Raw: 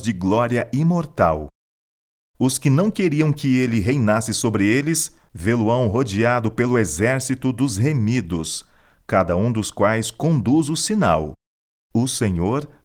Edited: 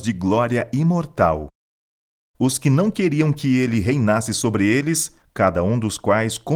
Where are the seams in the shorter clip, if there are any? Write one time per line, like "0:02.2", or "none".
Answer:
0:05.2